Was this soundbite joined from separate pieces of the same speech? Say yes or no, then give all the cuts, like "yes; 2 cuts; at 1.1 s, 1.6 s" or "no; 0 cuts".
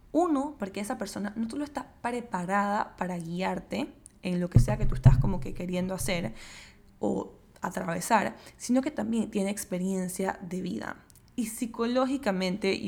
no; 0 cuts